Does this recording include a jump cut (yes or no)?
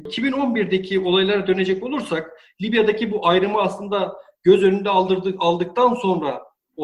no